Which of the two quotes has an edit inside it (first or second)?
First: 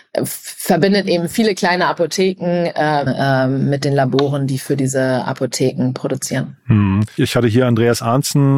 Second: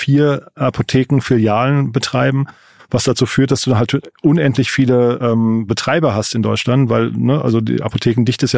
first